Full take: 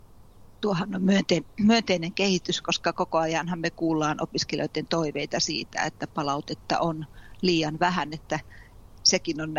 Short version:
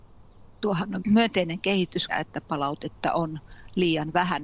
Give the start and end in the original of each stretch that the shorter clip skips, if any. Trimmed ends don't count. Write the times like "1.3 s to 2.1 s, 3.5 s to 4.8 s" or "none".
1.0 s to 1.5 s, 2.6 s to 5.7 s